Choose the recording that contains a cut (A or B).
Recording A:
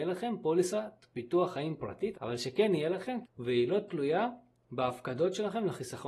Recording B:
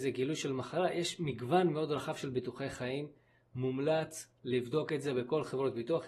A